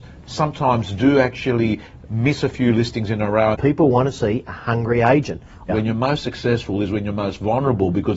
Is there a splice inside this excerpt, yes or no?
yes